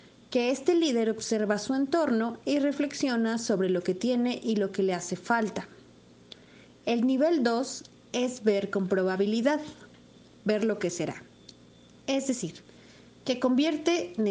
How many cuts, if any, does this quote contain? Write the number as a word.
zero